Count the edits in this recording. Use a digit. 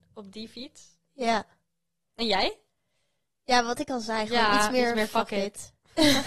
0